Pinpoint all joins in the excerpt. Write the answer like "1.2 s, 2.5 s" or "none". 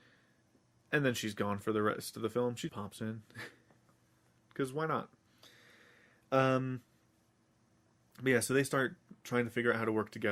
2.7 s